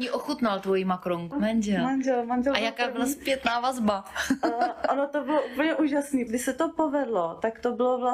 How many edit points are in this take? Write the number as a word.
two